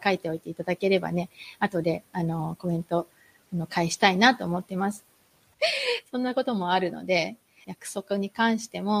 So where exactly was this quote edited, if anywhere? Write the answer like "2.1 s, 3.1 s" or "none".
5.5 s, 7.6 s